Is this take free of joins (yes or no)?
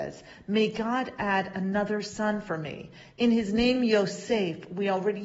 yes